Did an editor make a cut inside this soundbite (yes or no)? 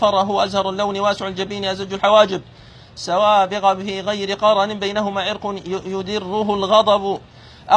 no